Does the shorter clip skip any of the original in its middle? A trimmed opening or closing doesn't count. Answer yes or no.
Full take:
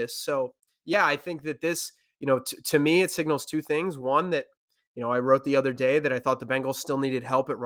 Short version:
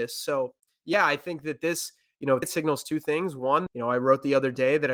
yes